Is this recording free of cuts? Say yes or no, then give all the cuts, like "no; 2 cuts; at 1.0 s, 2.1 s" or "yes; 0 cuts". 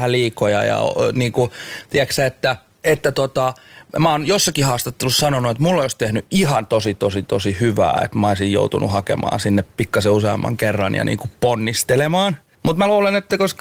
yes; 0 cuts